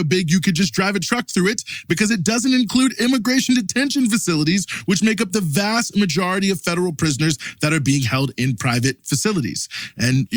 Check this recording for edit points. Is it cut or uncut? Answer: uncut